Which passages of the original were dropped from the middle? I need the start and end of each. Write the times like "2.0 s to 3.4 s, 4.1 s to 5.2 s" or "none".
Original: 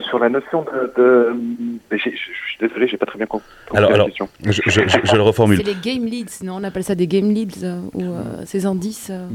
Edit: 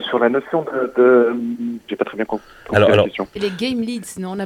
1.9 s to 2.9 s, 4.4 s to 5.6 s